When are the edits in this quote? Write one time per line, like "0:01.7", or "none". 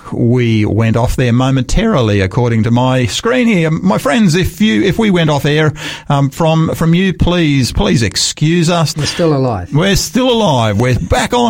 0:08.9